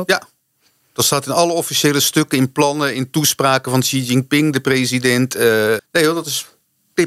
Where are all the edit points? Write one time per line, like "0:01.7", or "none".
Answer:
0:05.8